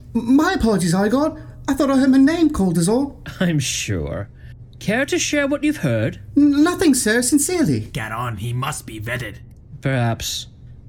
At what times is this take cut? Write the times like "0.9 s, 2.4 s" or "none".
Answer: none

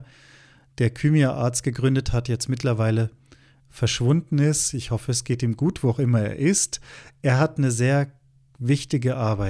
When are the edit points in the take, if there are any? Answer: none

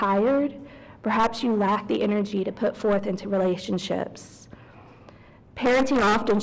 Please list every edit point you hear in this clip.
none

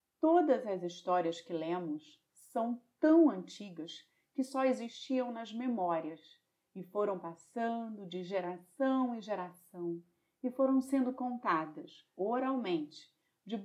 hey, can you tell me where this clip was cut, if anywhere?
none

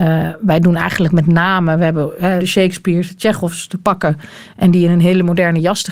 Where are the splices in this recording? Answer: 2.4 s

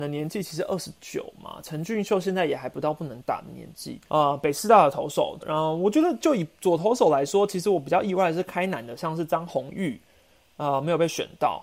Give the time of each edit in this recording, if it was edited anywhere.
4.1 s, 5.4 s

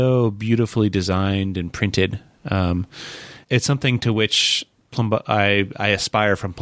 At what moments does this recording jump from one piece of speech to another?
3.4 s

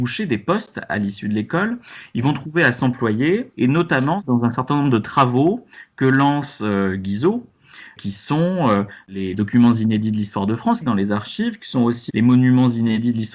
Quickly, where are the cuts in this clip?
9.3 s, 10.8 s, 12.1 s

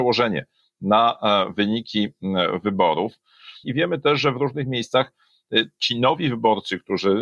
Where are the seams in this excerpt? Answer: 3.6 s

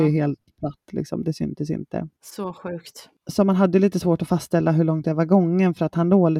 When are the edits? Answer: none

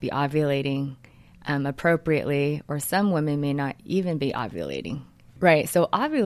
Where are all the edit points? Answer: 5.3 s

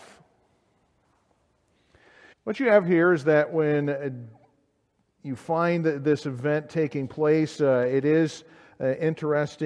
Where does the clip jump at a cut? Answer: 2.3 s

